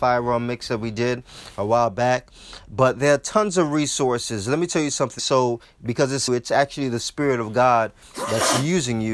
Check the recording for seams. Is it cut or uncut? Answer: cut